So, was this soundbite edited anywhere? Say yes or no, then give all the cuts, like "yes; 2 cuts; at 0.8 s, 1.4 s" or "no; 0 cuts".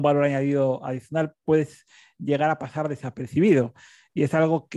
no; 0 cuts